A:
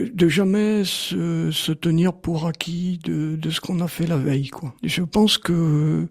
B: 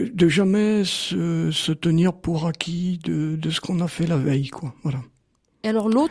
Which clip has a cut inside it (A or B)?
A